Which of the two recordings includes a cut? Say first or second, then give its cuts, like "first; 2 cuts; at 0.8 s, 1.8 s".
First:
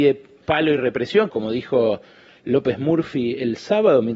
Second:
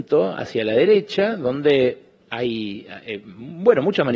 first; 1 cut; at 1.3 s